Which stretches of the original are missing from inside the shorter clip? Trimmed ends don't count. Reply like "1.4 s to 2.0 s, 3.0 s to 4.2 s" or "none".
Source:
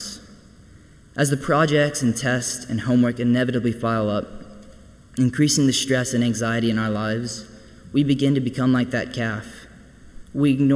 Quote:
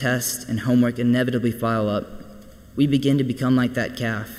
4.9 s to 7.9 s

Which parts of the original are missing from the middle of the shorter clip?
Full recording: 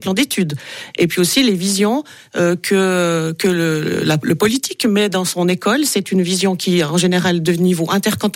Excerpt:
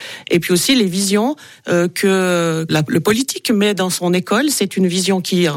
3.4 s to 4.0 s

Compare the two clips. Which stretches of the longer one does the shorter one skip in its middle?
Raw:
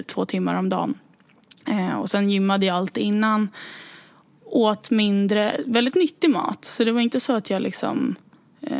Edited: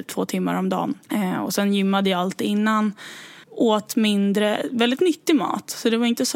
1.0 s to 1.6 s, 4.0 s to 4.4 s

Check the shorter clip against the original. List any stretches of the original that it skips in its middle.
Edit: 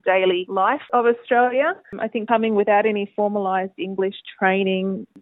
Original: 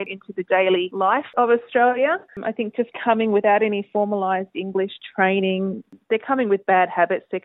2.7 s to 3.0 s

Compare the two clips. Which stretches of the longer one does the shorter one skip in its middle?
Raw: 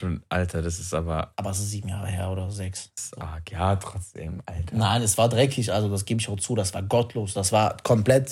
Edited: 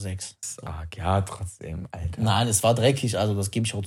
none

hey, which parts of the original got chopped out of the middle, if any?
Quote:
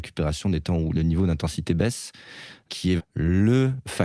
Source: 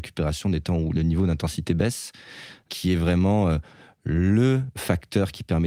3.0 s to 3.9 s

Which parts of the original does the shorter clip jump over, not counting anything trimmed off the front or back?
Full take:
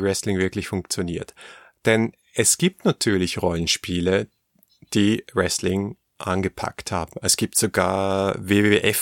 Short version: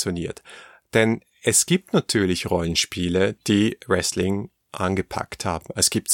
4.3 s to 4.8 s

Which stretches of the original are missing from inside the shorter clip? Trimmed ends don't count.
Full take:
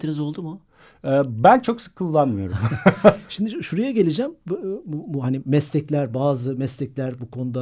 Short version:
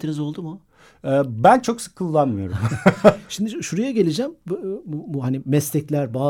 none

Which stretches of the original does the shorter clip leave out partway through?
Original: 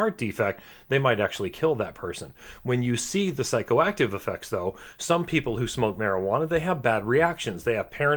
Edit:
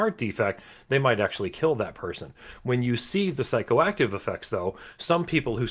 none

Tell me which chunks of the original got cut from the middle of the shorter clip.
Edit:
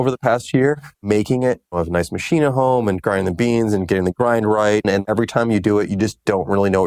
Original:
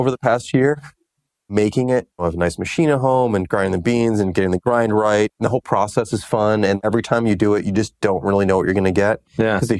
0.9 s to 1.4 s, 5.3 s to 6.6 s

